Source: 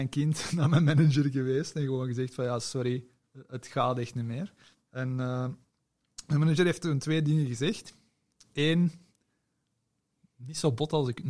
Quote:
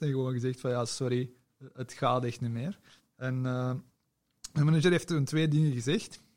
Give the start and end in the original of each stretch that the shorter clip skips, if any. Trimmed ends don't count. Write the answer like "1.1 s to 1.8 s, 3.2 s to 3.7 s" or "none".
none